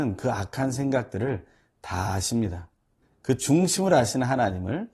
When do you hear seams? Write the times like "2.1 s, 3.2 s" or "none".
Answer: 3.0 s